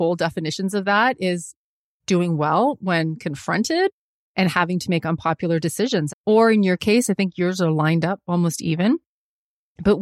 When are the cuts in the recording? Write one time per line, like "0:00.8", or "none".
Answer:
0:06.1